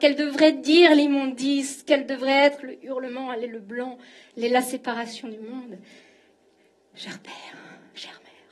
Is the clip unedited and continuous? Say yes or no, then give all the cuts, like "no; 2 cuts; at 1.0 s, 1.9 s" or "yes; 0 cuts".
yes; 0 cuts